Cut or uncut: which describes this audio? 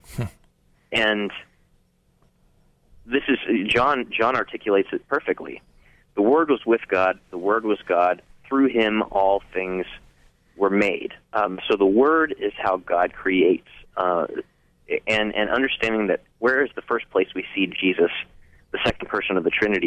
uncut